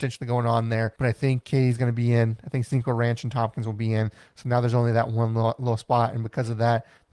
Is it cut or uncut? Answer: cut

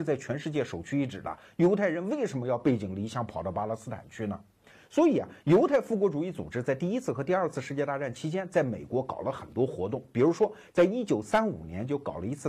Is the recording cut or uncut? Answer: uncut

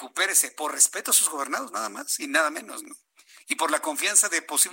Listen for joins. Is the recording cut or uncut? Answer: uncut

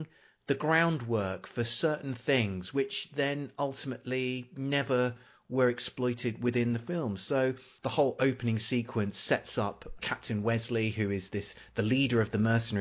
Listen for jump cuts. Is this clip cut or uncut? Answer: uncut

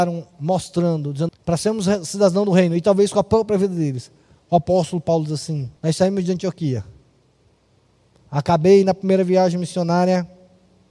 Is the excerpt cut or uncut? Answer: cut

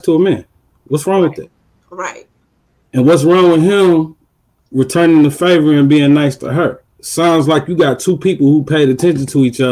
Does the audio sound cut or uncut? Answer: uncut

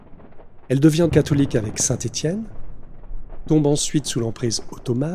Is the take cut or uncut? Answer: cut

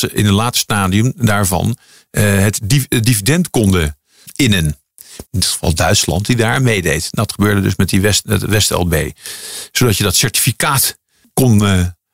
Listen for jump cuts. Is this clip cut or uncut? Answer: cut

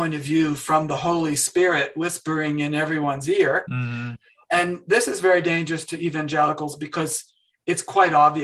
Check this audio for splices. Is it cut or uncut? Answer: uncut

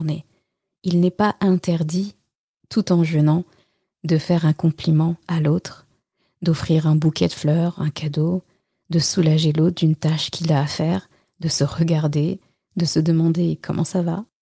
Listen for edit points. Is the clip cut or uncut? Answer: uncut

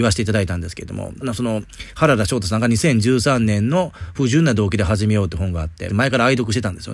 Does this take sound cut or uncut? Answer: cut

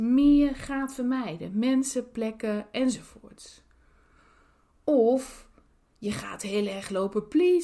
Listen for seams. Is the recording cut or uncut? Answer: uncut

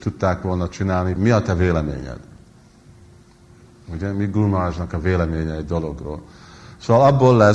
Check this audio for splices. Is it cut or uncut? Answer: cut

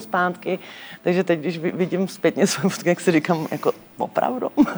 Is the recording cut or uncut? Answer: cut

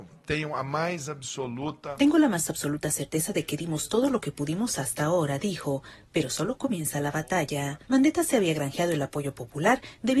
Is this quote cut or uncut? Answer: cut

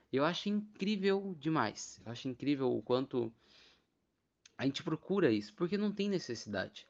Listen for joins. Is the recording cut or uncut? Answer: uncut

